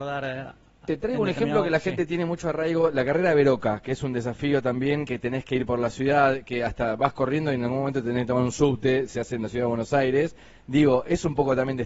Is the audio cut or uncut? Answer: uncut